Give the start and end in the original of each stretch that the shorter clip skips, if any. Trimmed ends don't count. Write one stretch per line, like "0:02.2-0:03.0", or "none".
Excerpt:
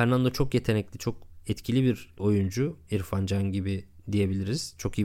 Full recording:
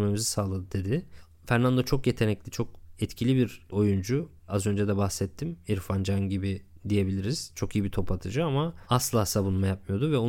0:04.4-0:05.6